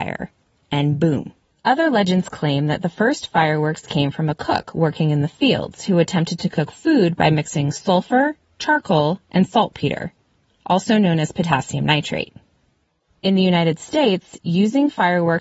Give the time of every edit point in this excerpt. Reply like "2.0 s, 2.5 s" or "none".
1.5 s